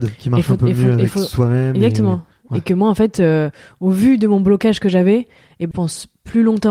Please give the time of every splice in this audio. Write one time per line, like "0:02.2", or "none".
0:05.7